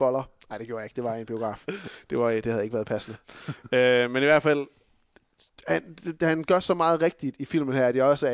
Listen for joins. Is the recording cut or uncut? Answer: uncut